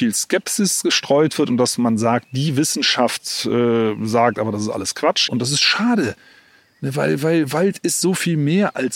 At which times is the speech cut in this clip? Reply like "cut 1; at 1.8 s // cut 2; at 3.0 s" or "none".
cut 1; at 5.3 s